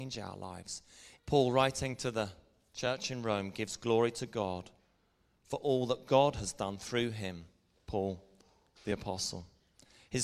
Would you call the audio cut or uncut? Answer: cut